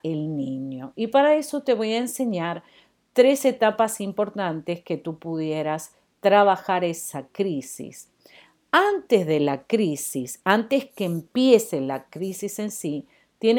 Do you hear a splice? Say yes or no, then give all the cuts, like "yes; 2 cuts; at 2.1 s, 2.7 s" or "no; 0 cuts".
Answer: no; 0 cuts